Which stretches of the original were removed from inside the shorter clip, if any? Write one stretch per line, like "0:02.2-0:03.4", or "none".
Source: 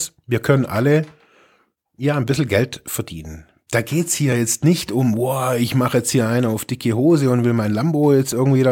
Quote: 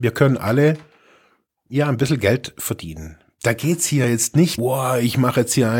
0:04.9-0:05.1